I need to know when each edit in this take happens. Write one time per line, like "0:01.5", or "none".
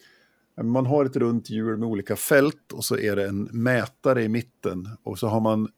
none